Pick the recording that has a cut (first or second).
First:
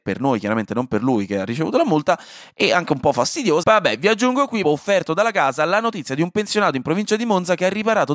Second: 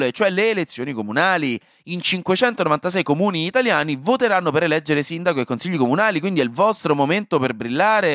first